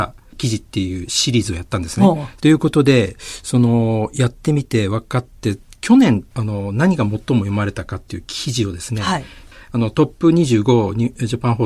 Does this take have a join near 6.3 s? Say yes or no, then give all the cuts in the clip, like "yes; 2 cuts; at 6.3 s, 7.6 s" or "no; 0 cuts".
yes; 2 cuts; at 2.4 s, 6.3 s